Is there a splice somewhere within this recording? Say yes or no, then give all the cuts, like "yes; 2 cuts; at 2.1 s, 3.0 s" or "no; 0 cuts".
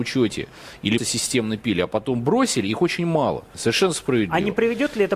yes; 2 cuts; at 1.0 s, 3.5 s